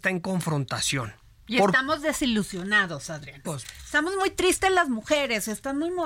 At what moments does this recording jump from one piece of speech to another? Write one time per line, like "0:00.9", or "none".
0:03.4